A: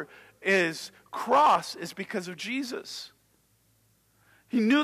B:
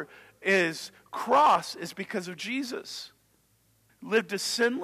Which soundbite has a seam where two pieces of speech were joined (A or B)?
B